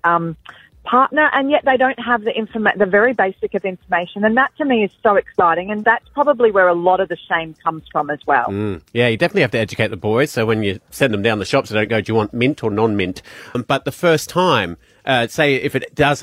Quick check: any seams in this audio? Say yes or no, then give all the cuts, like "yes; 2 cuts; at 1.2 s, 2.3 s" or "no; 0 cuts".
yes; 1 cut; at 13.5 s